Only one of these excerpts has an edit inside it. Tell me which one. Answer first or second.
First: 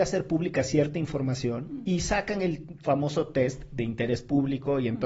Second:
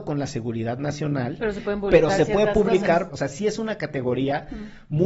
second